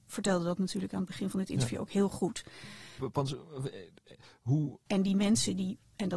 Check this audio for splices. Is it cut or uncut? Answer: cut